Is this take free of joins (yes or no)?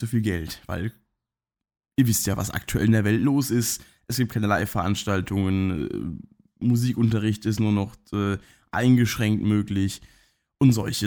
yes